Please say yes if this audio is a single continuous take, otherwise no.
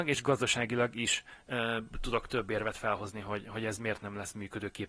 yes